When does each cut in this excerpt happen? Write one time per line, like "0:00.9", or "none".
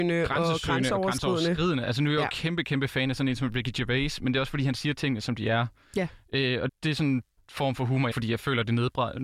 0:06.7
0:08.1